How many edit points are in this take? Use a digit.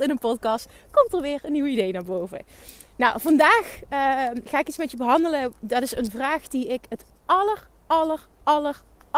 0